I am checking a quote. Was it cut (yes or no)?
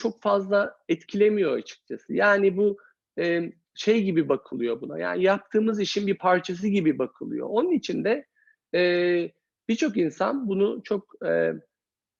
no